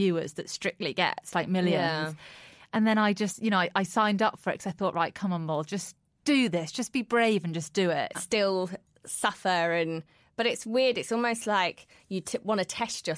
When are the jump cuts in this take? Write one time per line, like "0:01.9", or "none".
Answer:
0:08.1

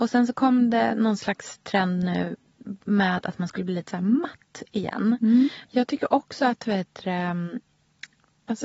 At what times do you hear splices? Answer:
0:02.8
0:05.6

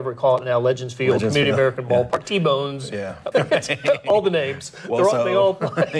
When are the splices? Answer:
0:03.3

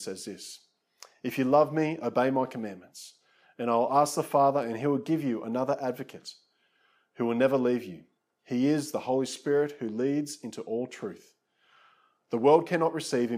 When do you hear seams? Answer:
none

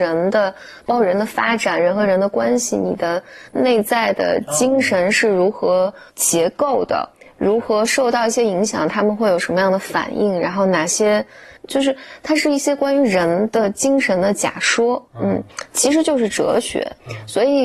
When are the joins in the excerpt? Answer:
0:11.7
0:15.7

